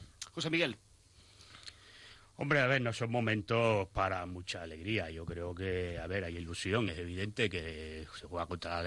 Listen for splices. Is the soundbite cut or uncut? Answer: uncut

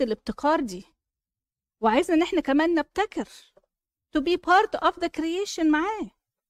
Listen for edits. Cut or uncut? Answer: uncut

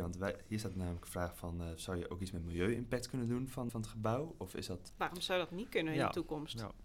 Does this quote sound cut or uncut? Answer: cut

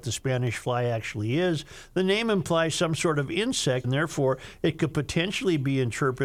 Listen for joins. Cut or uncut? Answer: cut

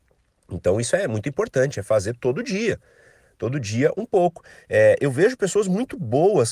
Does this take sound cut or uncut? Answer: cut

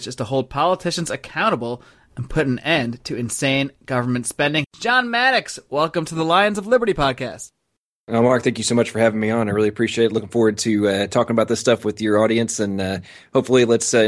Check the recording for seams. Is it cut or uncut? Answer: cut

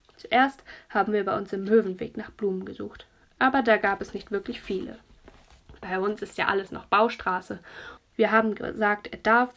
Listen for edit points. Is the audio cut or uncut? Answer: cut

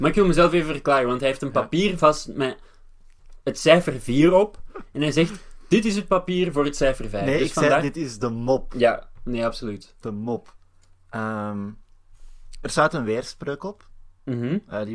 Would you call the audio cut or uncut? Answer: uncut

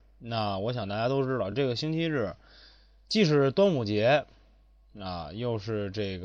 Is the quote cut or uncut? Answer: uncut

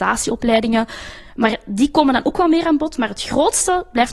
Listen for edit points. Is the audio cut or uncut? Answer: uncut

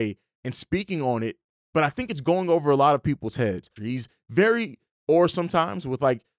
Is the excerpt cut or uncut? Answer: cut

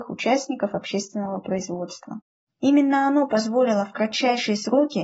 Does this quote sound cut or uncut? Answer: cut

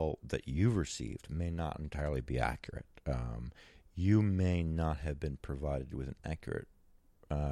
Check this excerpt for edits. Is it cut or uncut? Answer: uncut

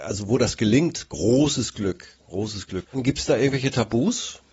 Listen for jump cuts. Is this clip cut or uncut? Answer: cut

